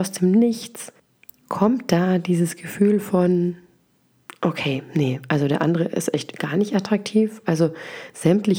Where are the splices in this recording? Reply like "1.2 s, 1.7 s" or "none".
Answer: none